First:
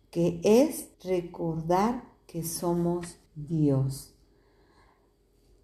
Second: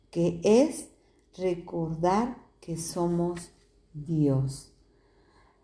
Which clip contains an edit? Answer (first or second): first